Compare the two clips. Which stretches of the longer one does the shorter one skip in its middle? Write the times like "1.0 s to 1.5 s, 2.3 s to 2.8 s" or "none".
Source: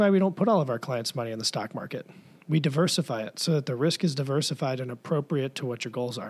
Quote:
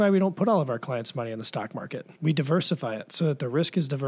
2.2 s to 2.4 s